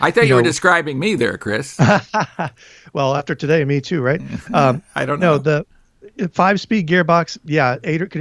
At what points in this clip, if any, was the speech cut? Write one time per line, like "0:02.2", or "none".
none

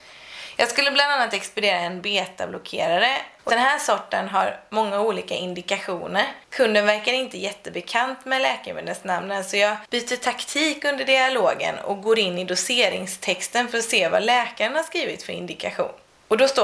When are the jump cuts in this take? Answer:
0:03.5

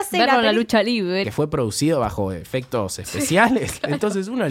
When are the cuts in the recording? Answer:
0:01.2

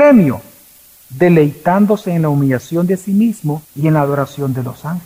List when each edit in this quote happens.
0:03.6

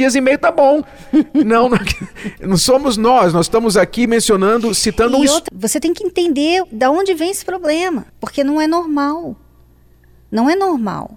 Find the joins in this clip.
0:05.5
0:08.1

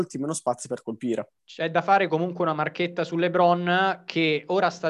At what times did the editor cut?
0:01.4

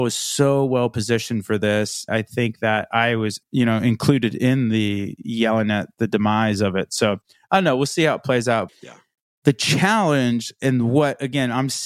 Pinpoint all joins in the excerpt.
0:02.1
0:08.7

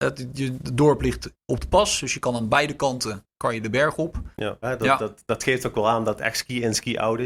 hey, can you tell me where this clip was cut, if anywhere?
0:04.6

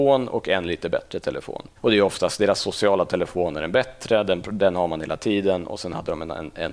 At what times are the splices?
0:01.8

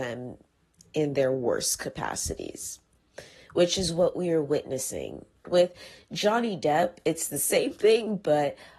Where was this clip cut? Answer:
0:05.4

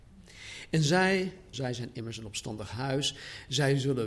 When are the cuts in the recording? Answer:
0:01.5

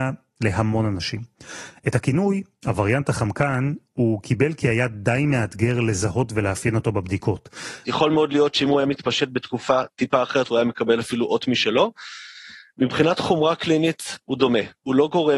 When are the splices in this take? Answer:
0:01.7
0:07.8

